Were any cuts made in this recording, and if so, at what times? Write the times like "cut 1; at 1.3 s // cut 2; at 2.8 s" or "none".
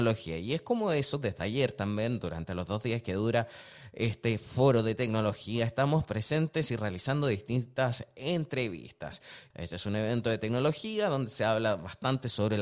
cut 1; at 9.5 s